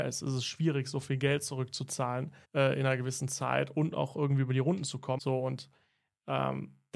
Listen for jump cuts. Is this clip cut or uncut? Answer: cut